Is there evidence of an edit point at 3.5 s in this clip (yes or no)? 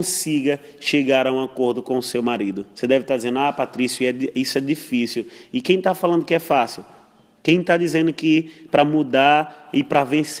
no